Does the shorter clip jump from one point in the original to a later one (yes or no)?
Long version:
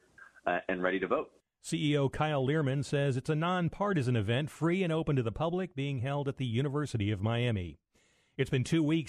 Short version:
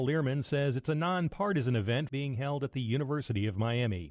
yes